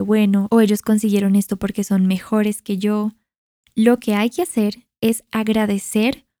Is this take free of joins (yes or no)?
yes